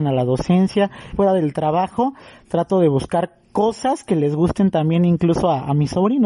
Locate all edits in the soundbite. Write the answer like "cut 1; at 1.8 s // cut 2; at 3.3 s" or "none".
cut 1; at 1.1 s